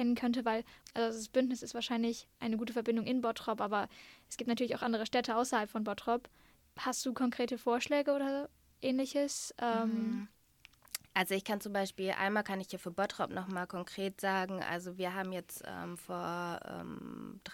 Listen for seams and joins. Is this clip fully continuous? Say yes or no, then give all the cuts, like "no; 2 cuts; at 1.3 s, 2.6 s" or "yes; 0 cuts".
yes; 0 cuts